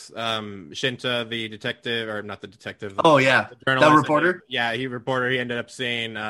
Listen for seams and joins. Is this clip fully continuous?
yes; 0 cuts

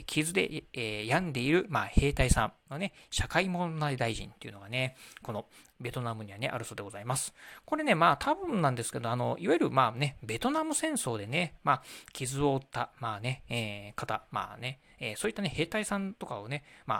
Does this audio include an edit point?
no; 0 cuts

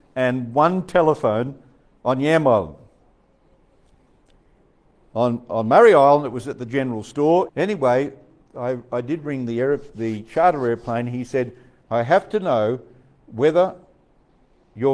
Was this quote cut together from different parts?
yes; 2 cuts; at 7.5 s, 11.8 s

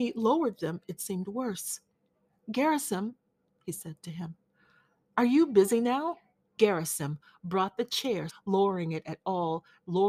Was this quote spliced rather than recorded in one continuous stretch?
yes; 2 cuts; at 6.6 s, 8.3 s

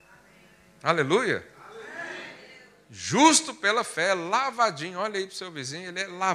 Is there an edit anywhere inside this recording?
no; 0 cuts

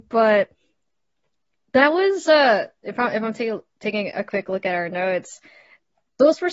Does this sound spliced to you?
no; 0 cuts

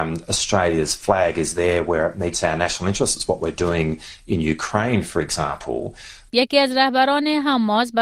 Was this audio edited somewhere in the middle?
yes; 1 cut; at 6.3 s

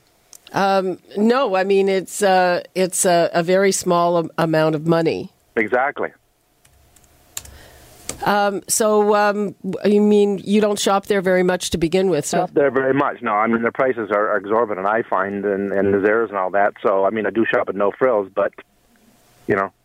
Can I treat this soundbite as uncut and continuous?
no; 1 cut; at 12.3 s

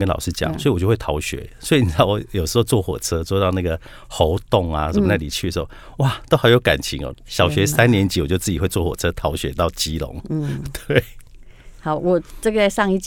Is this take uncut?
no; 1 cut; at 7.1 s

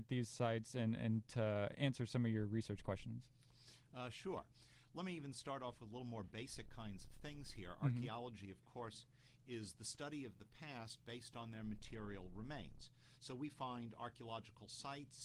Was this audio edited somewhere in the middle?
no; 0 cuts

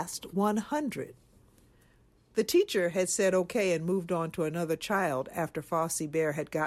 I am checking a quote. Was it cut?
no; 0 cuts

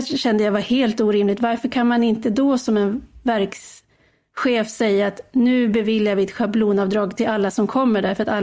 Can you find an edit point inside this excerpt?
no; 0 cuts

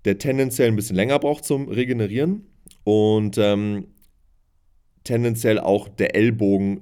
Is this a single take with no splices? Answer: yes; 0 cuts

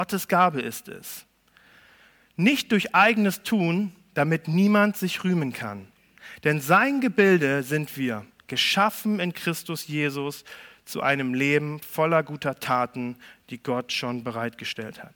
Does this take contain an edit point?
no; 0 cuts

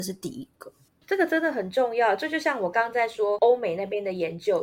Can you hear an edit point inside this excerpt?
yes; 1 cut; at 2.7 s

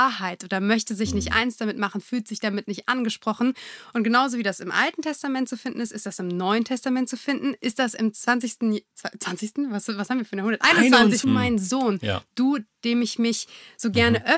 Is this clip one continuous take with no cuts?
no; 1 cut; at 11.2 s

